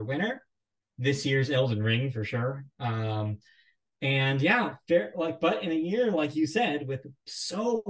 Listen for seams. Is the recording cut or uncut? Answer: uncut